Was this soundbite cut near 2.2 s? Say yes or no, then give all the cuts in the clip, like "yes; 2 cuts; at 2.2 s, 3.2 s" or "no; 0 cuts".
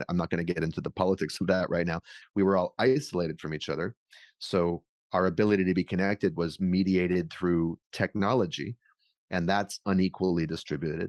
yes; 1 cut; at 2.2 s